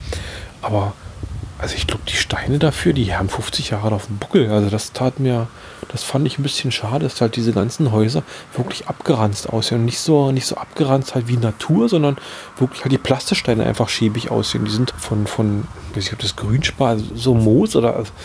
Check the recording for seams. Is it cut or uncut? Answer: cut